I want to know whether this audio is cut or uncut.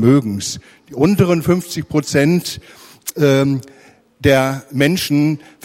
uncut